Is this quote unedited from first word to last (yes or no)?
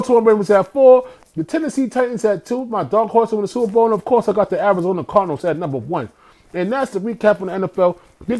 no